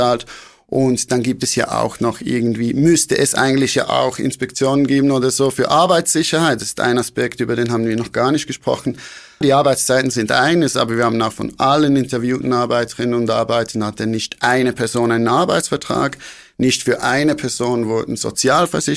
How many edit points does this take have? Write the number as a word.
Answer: one